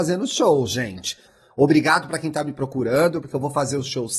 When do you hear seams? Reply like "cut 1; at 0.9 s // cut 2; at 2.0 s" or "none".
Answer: cut 1; at 1.2 s